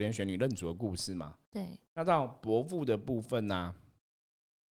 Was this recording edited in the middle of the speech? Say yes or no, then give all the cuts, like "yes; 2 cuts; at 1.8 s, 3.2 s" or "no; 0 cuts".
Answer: no; 0 cuts